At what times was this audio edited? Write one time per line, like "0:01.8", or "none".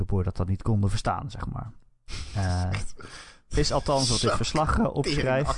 none